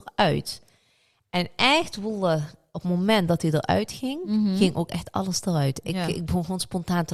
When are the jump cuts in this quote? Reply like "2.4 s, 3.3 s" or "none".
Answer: none